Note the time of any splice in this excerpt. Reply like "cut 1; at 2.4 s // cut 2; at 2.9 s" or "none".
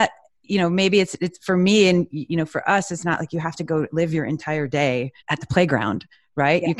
cut 1; at 5.2 s